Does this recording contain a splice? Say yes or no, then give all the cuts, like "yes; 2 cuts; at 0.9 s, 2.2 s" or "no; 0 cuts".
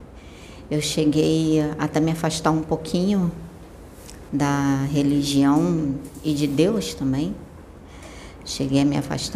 yes; 1 cut; at 4.3 s